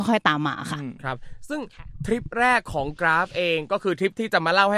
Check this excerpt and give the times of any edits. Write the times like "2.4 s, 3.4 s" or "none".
3.0 s